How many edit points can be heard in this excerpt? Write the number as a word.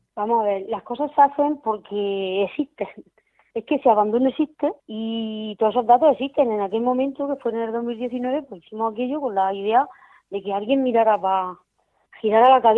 one